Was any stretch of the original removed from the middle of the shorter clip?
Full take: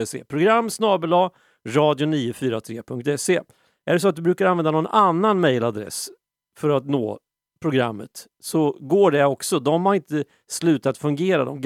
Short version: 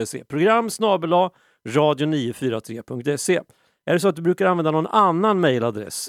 no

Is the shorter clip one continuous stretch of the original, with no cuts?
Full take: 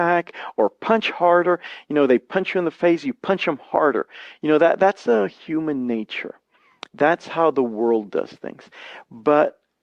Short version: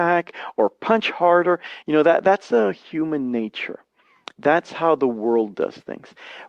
no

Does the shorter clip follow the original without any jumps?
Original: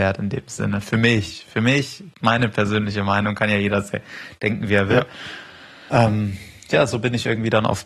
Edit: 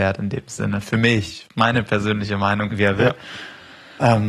no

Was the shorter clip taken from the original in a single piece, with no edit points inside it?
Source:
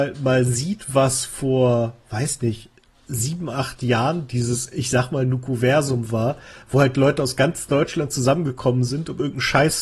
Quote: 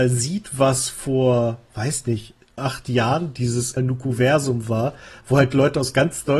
no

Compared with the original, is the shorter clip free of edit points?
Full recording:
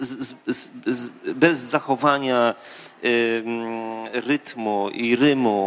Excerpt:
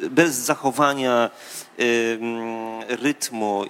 yes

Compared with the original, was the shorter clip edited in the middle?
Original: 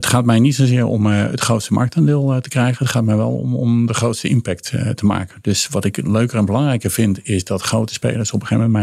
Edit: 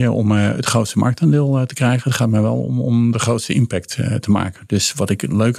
no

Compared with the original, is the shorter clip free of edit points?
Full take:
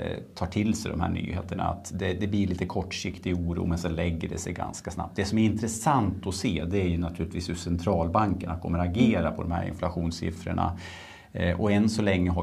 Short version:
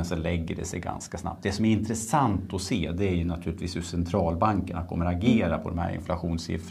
yes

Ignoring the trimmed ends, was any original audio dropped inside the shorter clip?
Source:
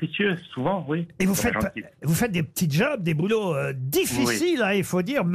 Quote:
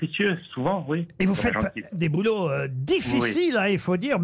yes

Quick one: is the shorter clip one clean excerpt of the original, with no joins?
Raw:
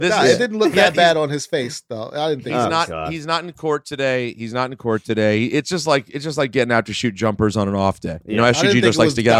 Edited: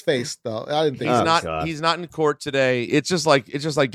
no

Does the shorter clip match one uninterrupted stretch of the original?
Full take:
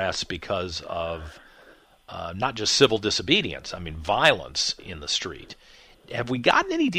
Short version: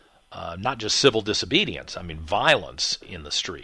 yes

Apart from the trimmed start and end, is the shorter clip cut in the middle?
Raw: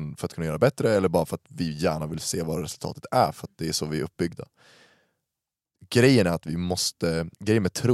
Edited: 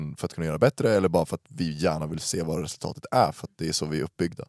no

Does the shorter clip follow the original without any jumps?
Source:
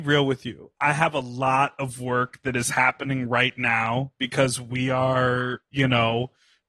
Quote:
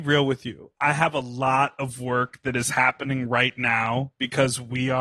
yes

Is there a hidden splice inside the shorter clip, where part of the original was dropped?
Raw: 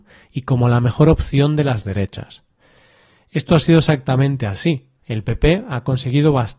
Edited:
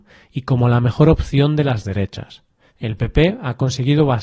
yes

